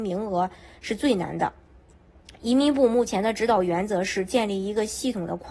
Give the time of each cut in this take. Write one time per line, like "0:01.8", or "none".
none